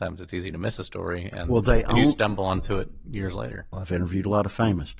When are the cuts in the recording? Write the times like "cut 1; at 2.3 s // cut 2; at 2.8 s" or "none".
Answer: cut 1; at 3.7 s